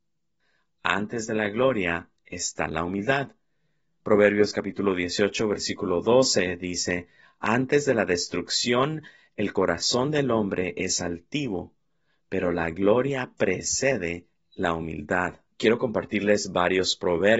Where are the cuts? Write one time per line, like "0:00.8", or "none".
0:15.5